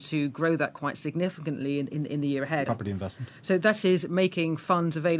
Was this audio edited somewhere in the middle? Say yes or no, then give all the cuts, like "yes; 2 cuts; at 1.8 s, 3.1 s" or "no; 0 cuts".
yes; 1 cut; at 2.7 s